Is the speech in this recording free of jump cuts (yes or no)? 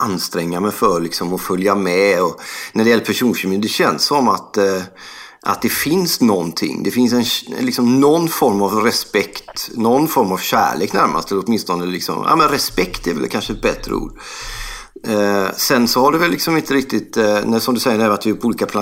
yes